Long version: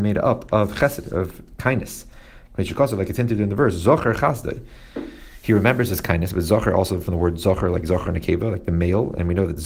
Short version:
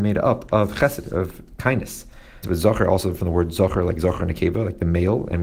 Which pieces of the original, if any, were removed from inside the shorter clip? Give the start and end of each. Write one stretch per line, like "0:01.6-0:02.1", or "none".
0:02.4-0:06.3